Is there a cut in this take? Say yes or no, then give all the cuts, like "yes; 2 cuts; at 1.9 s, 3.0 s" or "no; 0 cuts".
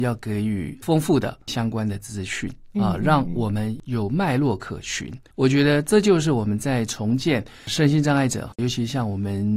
yes; 1 cut; at 5.3 s